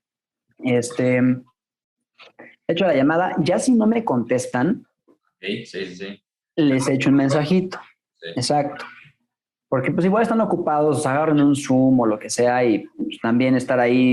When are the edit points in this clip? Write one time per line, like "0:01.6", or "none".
none